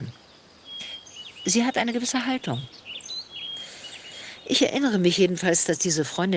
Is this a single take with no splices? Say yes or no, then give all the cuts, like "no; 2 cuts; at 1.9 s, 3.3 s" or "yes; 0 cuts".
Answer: yes; 0 cuts